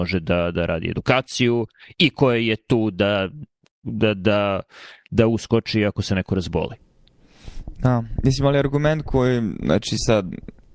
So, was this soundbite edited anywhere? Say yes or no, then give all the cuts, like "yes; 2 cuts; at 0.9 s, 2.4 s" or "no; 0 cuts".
no; 0 cuts